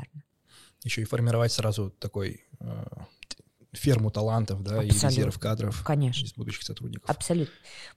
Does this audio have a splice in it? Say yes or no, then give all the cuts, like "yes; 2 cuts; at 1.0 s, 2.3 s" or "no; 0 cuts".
no; 0 cuts